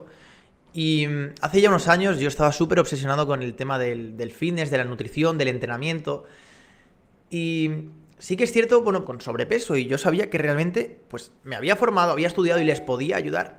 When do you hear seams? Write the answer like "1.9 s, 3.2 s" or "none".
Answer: 9.0 s, 11.4 s